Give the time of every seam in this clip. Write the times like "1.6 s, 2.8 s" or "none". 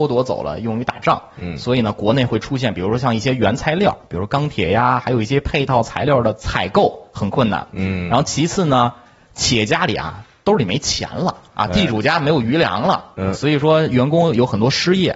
none